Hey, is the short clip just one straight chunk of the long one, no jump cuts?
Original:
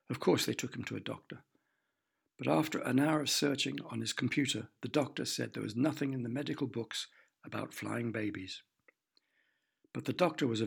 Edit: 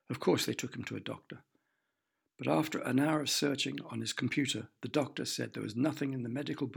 yes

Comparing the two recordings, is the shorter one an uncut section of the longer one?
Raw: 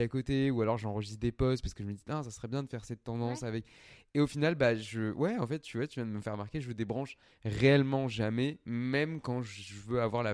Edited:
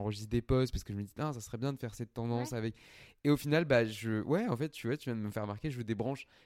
yes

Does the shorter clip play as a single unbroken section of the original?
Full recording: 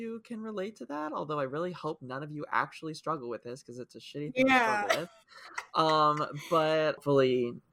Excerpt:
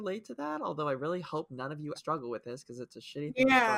no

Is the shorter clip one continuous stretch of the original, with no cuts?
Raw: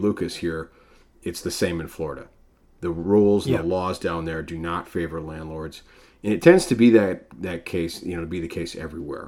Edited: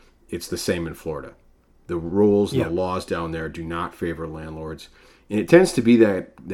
yes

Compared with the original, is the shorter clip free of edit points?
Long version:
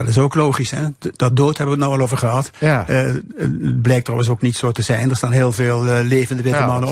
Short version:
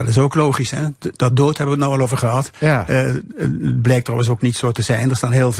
yes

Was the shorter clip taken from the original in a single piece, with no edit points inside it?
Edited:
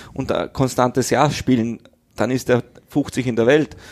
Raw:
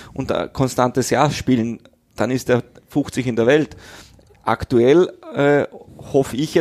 yes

